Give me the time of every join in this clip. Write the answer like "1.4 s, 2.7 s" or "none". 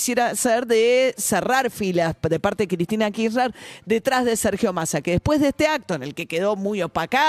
none